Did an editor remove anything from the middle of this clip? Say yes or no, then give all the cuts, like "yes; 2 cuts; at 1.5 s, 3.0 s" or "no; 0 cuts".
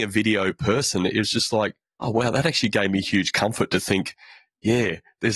no; 0 cuts